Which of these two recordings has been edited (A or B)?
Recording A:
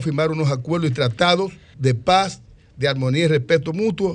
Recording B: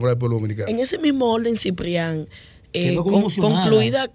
A